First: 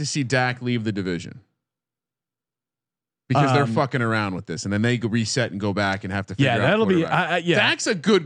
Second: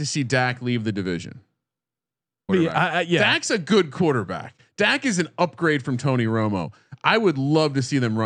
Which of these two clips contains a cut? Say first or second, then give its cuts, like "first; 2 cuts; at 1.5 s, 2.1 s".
second; 1 cut; at 2.5 s